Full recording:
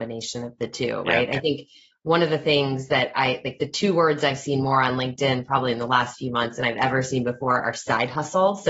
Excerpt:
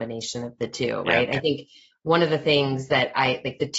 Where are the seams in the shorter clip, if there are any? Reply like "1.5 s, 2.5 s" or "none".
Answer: none